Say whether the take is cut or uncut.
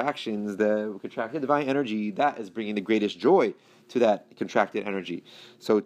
uncut